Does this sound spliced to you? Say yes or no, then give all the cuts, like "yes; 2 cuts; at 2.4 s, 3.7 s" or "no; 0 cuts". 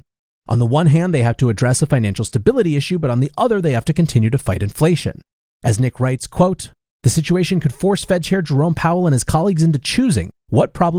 no; 0 cuts